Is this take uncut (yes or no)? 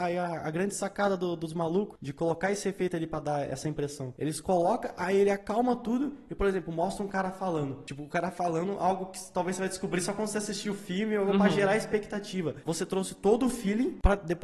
yes